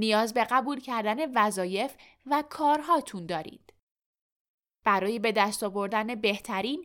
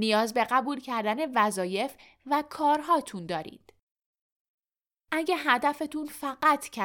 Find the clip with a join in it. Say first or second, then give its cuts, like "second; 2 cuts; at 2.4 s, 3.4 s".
first; 1 cut; at 4.6 s